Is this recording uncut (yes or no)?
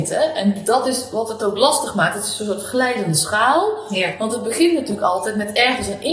yes